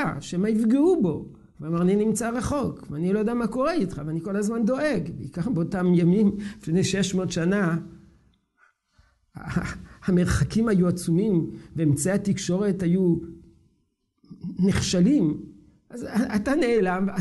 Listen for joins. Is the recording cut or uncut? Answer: uncut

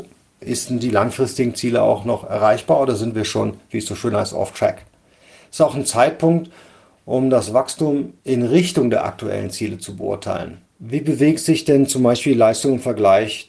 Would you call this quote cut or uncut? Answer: cut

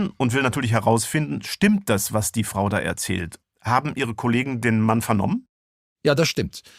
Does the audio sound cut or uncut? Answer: cut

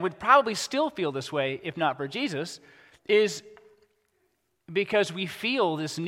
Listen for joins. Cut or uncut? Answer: uncut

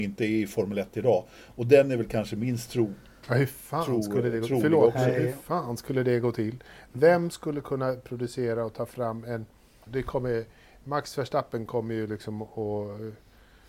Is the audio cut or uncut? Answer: cut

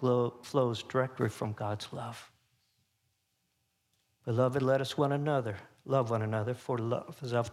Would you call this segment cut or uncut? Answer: uncut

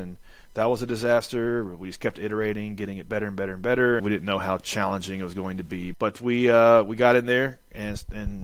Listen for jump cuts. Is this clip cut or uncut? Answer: cut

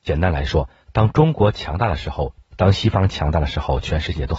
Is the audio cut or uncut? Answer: cut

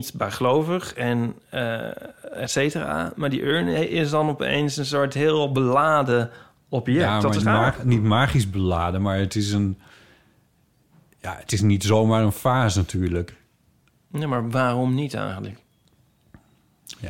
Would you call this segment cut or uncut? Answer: cut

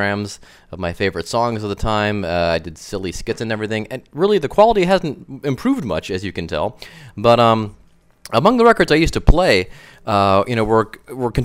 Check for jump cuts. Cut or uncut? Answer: uncut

